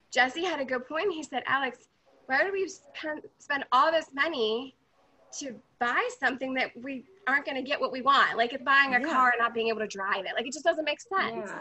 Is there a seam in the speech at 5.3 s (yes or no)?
no